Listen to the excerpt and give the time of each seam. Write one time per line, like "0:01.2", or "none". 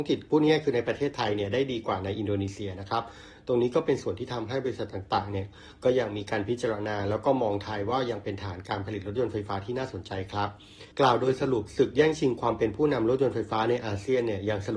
0:10.9

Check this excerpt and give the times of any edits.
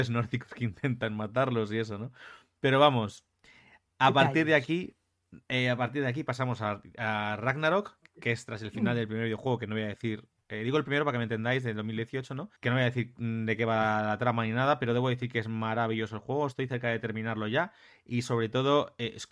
0:12.6

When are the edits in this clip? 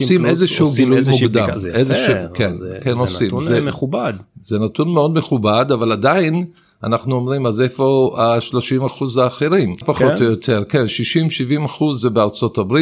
0:09.8

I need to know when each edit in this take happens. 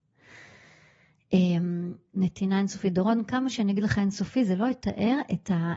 0:02.1

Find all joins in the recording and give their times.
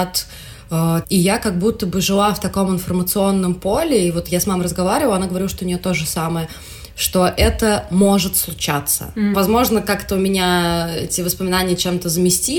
0:01.0
0:09.3

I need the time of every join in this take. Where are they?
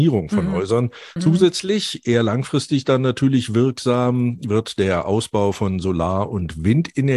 0:01.2

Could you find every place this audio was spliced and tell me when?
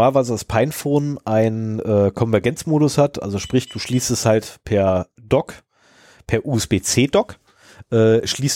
none

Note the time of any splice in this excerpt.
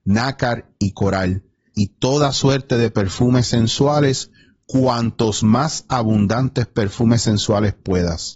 0:01.7

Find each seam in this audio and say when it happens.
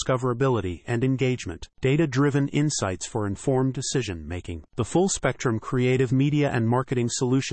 none

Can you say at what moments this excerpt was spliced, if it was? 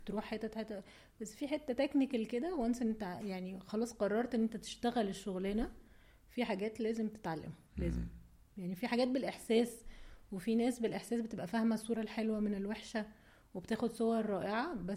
0:07.7

